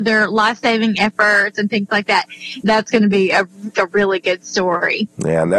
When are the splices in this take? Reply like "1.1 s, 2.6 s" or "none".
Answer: 2.6 s, 3.7 s